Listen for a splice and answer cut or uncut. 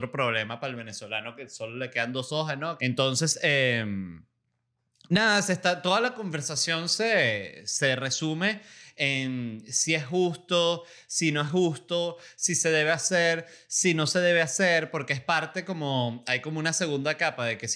cut